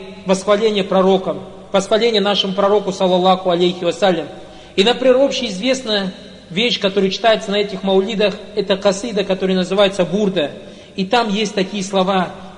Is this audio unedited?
yes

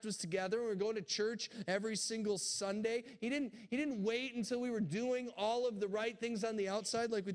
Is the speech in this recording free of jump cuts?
yes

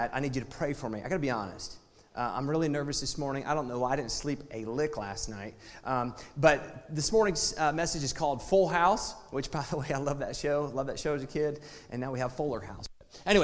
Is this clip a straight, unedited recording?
yes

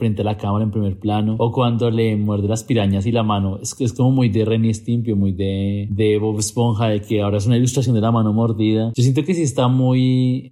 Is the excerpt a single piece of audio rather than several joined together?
yes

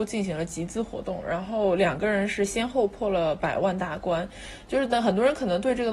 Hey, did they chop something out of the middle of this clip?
no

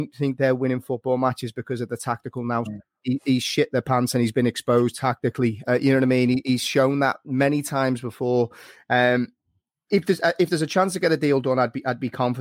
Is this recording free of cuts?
no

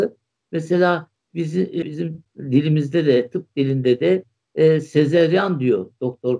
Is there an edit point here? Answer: yes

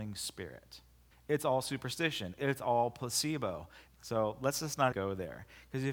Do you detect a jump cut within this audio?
yes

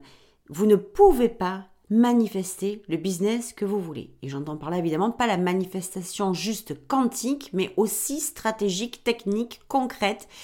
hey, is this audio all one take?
yes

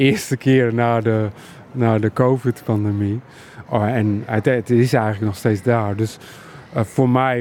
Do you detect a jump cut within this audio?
no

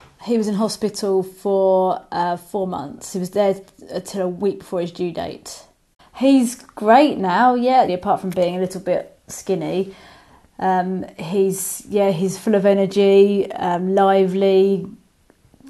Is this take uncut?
no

